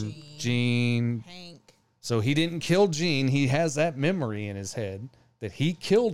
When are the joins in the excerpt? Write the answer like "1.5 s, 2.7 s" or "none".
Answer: none